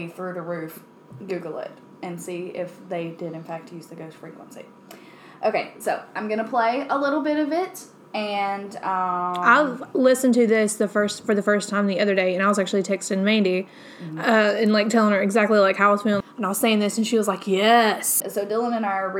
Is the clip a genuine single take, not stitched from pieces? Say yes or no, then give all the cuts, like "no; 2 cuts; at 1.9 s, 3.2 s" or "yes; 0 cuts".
no; 2 cuts; at 16.2 s, 18.2 s